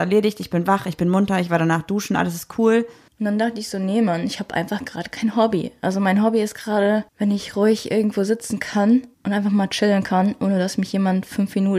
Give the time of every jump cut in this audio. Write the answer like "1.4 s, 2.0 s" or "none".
3.1 s, 7.1 s, 9.1 s